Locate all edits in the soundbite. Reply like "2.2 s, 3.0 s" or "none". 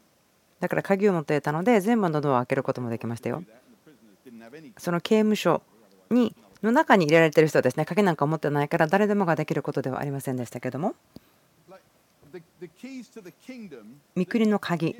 none